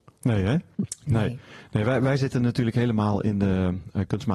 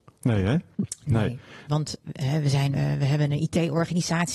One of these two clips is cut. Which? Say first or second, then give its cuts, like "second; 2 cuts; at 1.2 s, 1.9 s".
second; 2 cuts; at 1.7 s, 2.7 s